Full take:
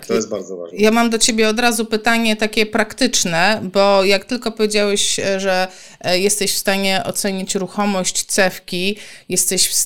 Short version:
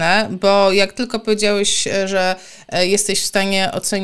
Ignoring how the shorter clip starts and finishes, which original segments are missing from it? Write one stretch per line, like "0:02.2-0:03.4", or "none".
none